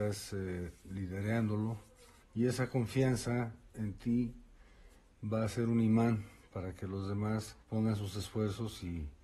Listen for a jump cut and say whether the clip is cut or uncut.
cut